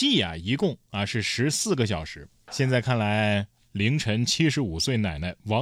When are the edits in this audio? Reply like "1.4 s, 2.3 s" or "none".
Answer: 2.5 s